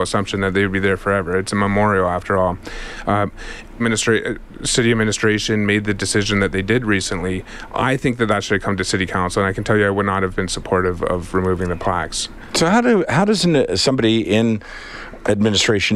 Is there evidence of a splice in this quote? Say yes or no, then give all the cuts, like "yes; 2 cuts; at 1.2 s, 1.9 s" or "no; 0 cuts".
yes; 1 cut; at 3.8 s